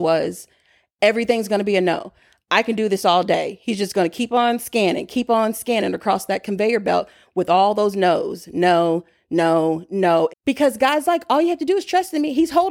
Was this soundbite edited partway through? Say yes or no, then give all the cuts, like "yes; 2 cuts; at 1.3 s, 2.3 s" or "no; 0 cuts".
yes; 1 cut; at 10.3 s